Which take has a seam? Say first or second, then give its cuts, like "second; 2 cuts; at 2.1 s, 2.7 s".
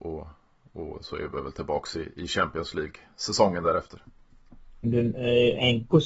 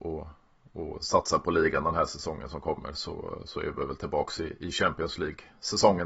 first; 2 cuts; at 1.0 s, 4.8 s